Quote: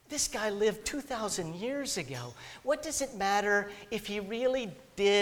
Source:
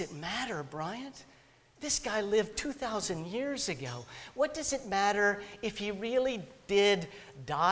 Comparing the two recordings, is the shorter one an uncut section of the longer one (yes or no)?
yes